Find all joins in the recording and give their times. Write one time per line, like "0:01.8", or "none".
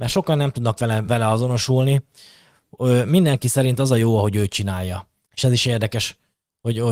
0:01.1
0:05.3